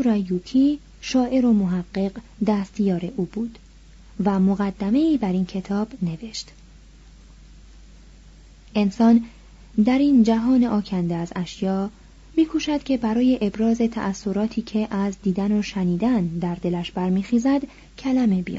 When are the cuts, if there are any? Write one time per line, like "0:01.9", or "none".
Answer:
0:08.7